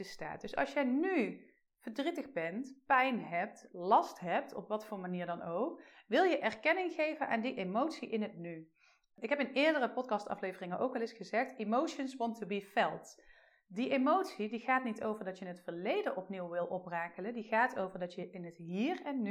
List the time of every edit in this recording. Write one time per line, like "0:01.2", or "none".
none

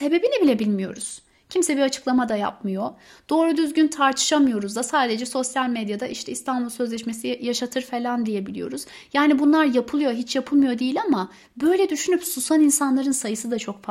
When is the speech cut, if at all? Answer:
none

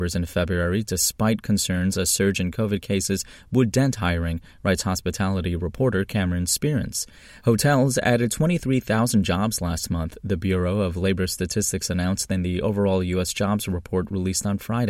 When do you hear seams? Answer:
none

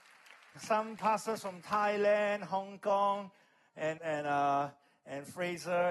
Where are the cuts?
0:04.0

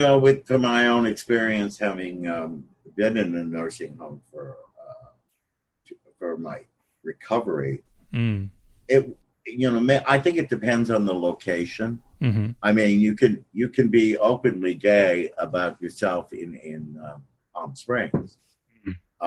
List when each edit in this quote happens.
none

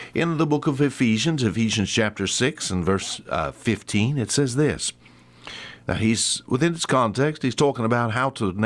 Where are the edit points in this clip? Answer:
none

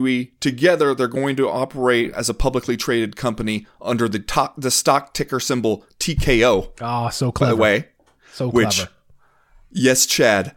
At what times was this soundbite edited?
none

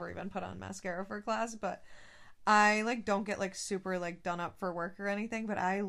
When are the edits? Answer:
none

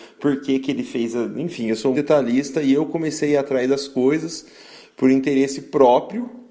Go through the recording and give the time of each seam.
0:01.9

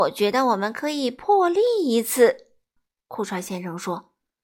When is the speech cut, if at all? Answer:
0:02.8

